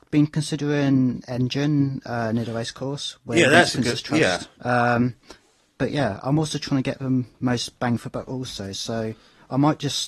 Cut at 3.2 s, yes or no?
no